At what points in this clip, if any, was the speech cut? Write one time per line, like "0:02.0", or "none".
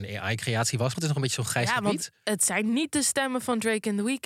0:00.9